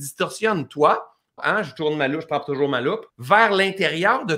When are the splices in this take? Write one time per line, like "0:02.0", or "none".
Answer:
0:01.4
0:03.1